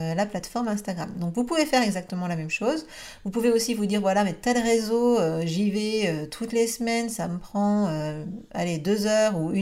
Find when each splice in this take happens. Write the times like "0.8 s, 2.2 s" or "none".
none